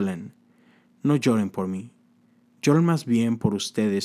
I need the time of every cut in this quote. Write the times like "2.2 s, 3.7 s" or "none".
none